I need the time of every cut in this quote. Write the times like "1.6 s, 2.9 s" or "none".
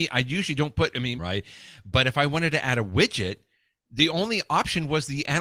1.2 s